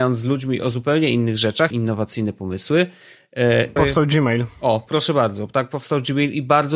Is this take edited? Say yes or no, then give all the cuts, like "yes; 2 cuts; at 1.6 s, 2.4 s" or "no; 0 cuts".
yes; 2 cuts; at 1.7 s, 3.8 s